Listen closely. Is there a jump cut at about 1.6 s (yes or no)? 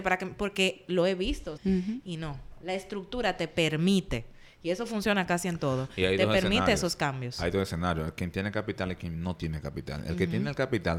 yes